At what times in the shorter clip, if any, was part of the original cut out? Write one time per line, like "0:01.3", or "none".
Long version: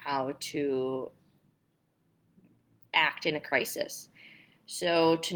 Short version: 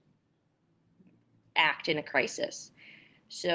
none